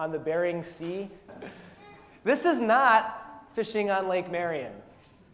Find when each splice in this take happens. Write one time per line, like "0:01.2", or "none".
0:01.3